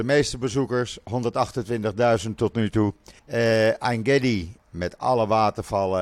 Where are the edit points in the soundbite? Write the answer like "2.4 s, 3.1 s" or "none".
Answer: 3.2 s, 4.6 s